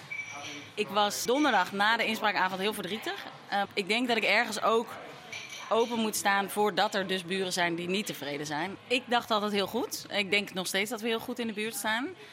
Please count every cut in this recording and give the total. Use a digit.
3